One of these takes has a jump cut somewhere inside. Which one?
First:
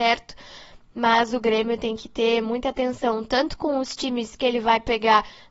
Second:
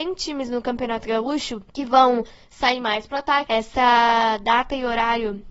second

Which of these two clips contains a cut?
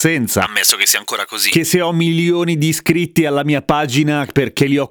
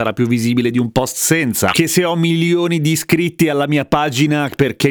second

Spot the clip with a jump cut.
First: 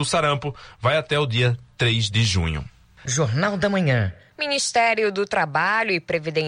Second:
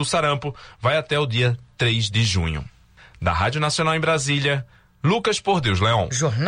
first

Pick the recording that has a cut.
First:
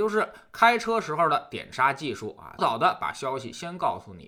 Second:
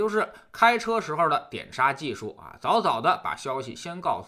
first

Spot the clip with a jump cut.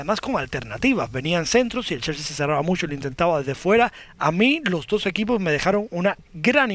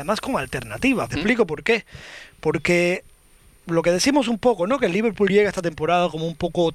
second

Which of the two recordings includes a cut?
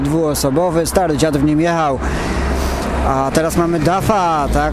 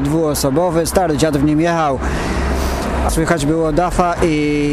second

